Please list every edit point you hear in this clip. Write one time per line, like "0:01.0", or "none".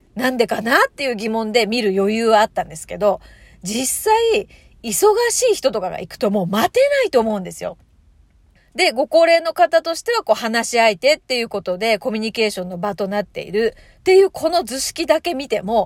0:08.6

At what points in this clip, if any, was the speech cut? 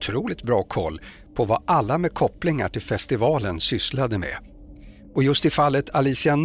none

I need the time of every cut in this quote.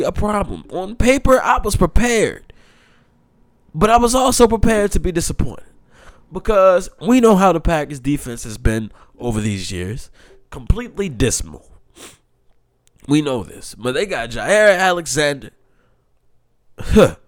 none

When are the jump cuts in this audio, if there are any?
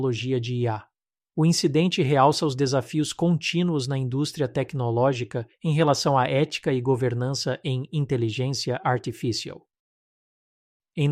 none

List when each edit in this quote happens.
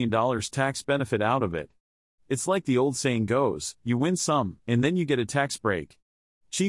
0:04.6

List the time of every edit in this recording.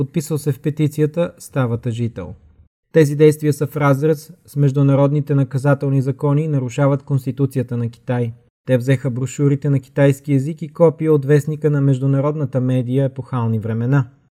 0:02.7
0:08.5

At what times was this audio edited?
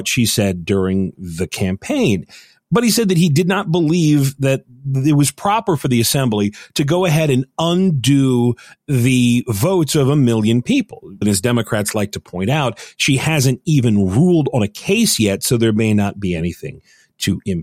0:11.2

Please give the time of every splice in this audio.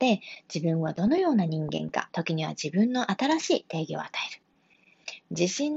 0:02.1

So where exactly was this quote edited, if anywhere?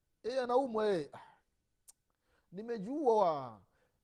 none

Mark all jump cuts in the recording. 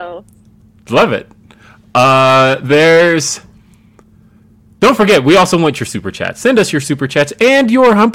none

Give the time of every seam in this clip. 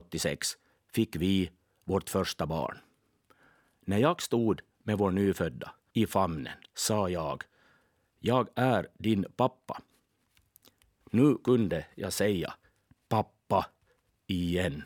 0:05.9
0:11.0

